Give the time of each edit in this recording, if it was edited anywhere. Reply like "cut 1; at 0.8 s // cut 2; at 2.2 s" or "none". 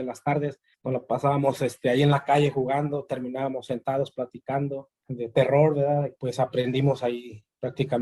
cut 1; at 5.0 s // cut 2; at 6.1 s